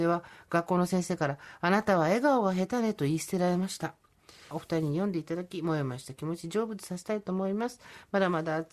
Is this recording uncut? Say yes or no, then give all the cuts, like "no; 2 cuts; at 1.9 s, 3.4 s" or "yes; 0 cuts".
no; 1 cut; at 4.5 s